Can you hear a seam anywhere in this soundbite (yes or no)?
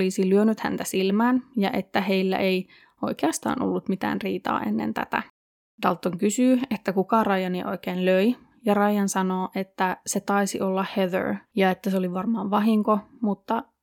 yes